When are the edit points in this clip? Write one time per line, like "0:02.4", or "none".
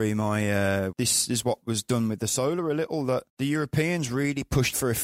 0:00.9
0:03.3